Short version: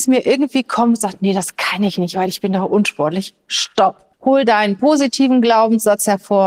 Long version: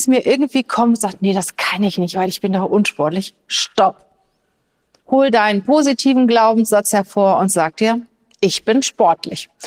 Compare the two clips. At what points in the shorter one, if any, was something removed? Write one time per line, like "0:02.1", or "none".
0:04.1